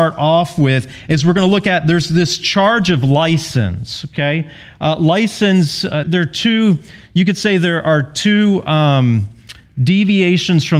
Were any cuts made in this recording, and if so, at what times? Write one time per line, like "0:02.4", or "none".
0:06.0